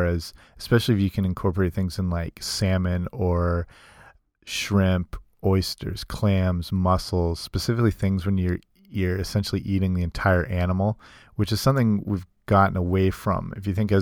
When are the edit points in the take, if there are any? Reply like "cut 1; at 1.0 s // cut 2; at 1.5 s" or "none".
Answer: none